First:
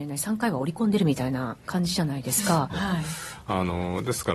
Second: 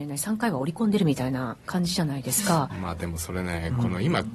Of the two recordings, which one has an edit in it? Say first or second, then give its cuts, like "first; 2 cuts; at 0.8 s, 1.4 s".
first; 1 cut; at 2.7 s